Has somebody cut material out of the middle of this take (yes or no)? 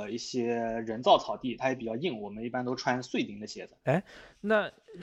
yes